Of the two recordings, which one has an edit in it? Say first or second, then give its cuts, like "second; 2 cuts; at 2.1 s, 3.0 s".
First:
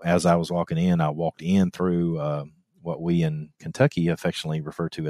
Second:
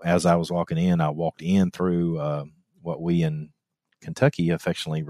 first; 1 cut; at 3.5 s